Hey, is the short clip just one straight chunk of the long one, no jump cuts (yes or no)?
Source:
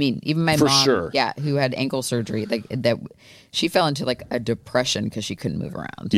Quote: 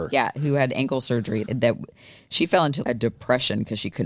no